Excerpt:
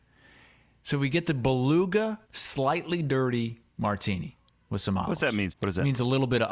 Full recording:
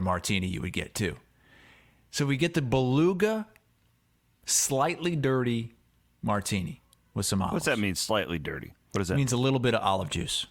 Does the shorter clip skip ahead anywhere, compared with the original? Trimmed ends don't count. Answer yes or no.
yes